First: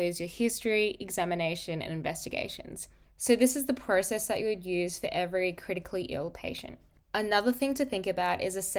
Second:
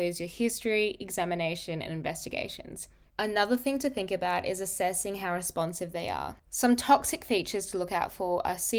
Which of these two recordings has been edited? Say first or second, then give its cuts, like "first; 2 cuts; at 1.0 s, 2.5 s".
second; 2 cuts; at 3.1 s, 6.4 s